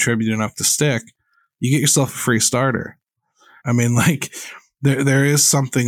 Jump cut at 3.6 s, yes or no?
yes